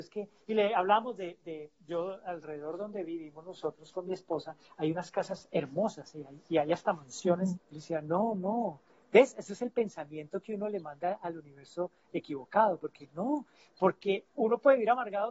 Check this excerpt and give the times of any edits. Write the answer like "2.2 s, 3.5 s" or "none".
7.6 s